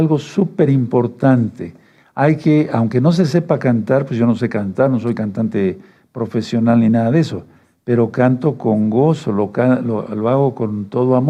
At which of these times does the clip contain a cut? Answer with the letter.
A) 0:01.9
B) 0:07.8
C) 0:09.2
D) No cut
D